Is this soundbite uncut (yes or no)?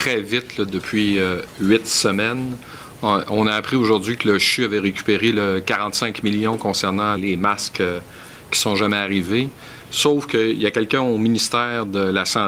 no